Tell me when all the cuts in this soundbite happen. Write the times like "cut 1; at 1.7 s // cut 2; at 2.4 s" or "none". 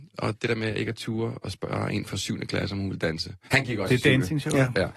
none